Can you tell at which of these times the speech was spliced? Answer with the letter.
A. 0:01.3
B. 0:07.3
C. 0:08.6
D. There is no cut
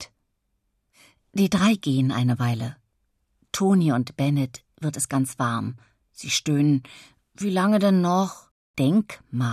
C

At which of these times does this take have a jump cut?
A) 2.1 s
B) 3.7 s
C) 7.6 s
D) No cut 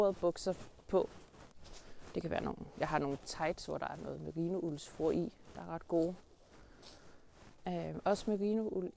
C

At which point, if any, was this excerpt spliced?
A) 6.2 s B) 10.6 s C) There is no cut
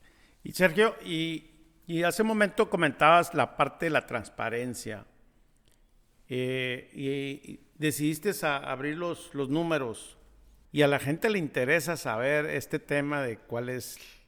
B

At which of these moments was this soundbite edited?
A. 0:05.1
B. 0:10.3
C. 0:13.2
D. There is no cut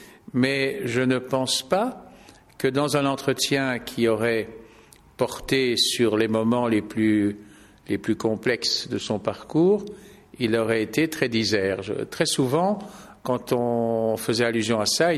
D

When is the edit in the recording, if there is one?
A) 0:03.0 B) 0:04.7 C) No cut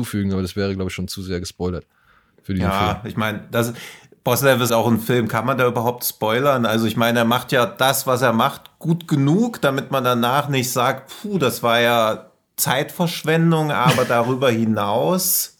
B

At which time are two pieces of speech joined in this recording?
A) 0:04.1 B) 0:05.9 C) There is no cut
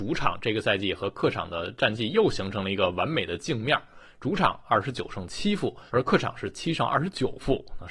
B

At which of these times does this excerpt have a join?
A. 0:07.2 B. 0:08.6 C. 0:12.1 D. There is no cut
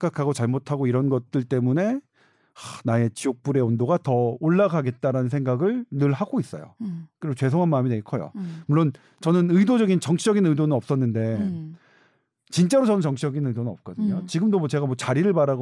D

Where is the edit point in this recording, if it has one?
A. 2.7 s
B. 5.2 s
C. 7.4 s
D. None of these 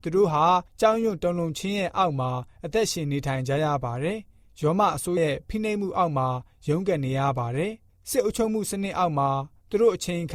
B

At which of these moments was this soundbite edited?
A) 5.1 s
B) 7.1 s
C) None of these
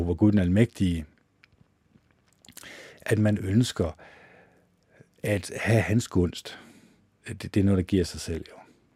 B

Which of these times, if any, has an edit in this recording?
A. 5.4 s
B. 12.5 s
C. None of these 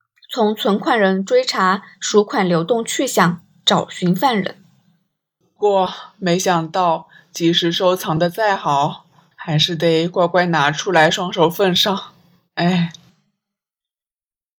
A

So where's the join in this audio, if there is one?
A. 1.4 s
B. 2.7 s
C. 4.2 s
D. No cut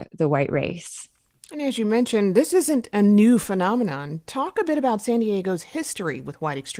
D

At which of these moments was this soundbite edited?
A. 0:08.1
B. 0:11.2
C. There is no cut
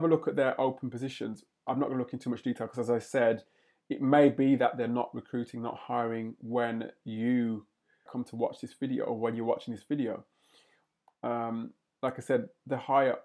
A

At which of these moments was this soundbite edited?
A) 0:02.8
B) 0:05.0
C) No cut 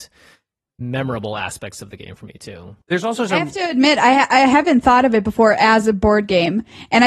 A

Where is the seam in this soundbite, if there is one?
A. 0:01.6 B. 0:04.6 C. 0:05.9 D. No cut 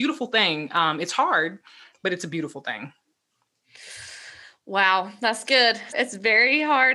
C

